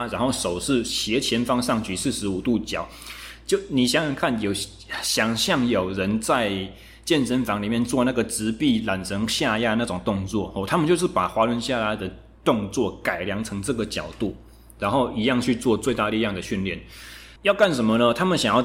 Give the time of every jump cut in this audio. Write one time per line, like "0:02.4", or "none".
0:17.4